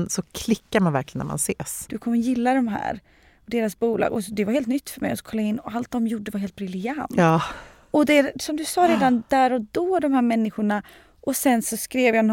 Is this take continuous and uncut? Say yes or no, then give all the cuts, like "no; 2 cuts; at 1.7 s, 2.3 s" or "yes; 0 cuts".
no; 1 cut; at 1.9 s